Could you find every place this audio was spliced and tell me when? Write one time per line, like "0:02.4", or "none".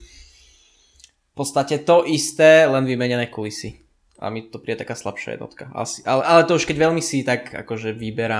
0:06.2